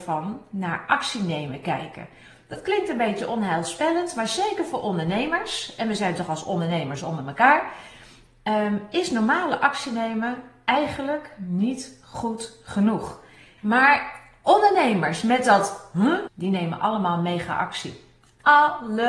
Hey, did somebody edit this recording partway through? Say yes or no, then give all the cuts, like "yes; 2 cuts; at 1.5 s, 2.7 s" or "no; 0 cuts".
yes; 2 cuts; at 13.6 s, 16.3 s